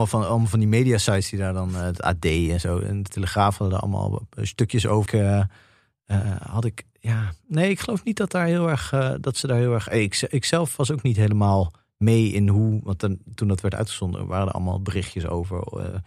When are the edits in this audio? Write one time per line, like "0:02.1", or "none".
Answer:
0:05.1
0:13.4